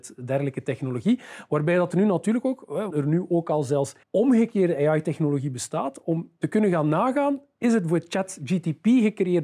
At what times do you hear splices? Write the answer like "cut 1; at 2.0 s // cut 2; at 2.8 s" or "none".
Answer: cut 1; at 2.9 s // cut 2; at 4.0 s